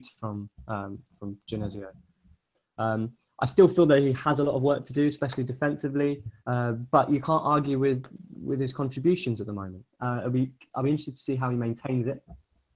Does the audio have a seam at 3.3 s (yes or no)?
no